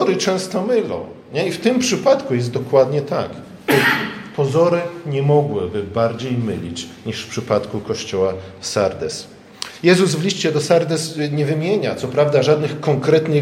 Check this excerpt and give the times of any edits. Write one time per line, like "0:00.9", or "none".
none